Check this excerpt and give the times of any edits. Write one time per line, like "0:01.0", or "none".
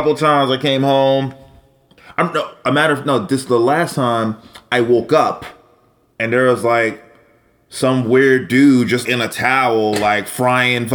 0:06.1
0:09.0